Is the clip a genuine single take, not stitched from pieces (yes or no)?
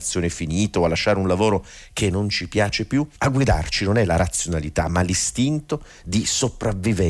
no